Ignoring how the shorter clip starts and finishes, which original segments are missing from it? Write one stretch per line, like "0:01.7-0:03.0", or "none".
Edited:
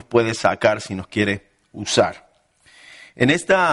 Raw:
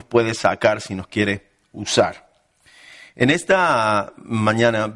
none